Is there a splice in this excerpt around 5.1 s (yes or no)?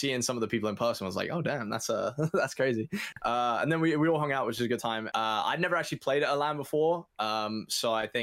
yes